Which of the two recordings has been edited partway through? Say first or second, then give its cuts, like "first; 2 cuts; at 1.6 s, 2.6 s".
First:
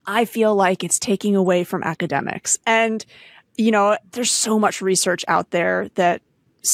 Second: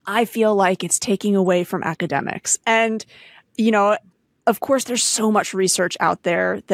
first; 1 cut; at 4.1 s